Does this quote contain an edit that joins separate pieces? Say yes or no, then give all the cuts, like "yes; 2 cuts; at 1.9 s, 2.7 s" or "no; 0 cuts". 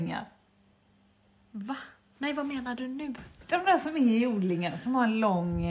no; 0 cuts